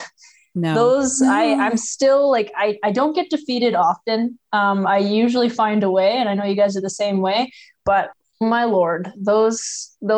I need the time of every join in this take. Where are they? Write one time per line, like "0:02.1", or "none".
none